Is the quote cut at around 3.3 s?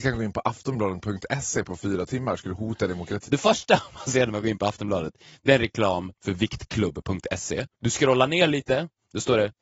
yes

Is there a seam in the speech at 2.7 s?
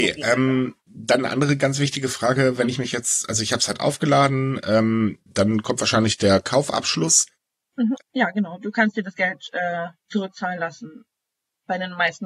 no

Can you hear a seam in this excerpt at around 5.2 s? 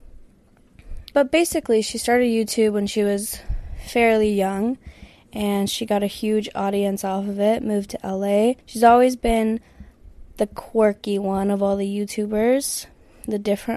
no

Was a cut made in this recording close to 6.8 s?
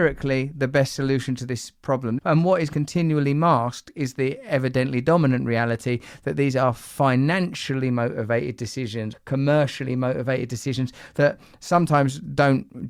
no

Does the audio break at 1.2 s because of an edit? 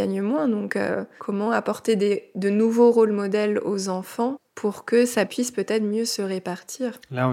yes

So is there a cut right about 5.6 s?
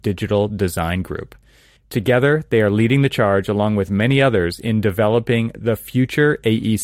no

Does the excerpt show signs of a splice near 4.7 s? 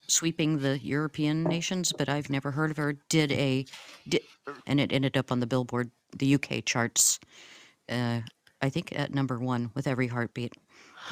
yes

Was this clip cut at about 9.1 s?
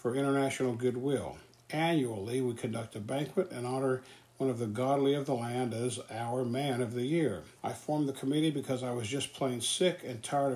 no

